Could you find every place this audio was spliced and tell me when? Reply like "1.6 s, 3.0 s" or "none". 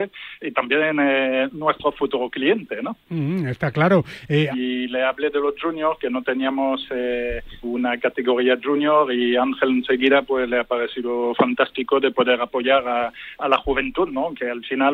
4.5 s, 7.6 s